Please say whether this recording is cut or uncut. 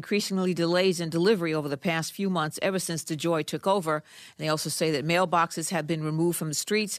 uncut